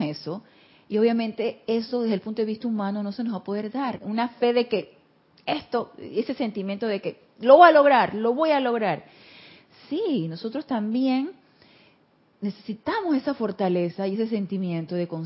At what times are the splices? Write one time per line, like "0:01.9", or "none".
0:04.0